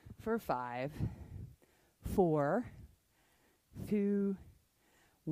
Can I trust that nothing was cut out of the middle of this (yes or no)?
no